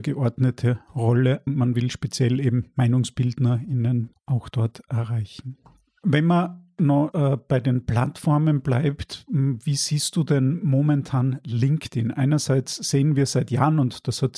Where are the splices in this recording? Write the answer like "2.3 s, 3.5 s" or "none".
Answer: 1.5 s, 4.1 s, 7.1 s

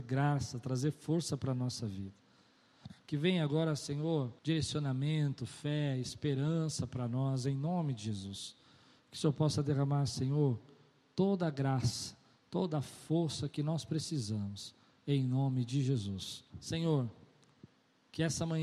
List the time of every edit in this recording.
4.4 s, 16.5 s

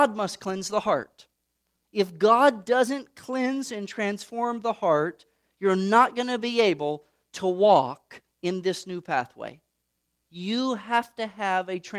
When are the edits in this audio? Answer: 10.2 s

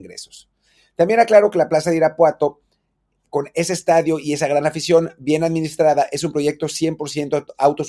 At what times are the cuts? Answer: none

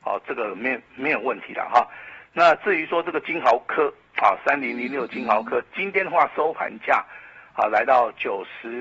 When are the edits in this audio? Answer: none

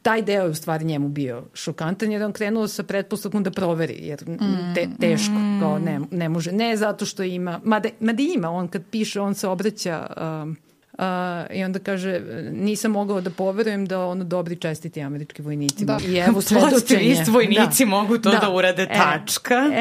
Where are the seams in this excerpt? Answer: 10.8 s, 16.0 s

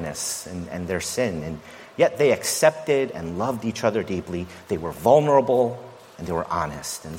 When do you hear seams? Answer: none

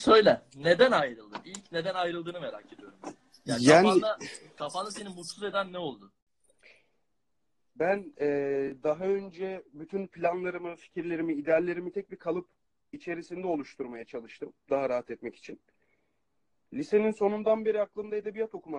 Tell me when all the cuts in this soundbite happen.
none

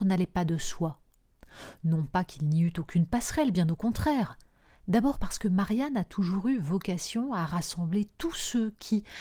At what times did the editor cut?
none

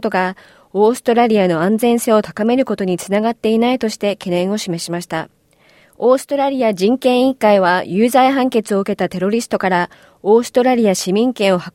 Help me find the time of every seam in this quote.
5.8 s

